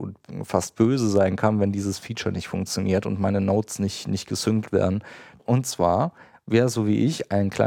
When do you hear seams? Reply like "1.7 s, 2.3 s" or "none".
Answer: 5.4 s